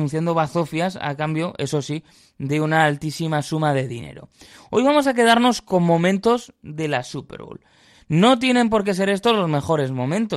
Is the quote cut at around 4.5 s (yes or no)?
no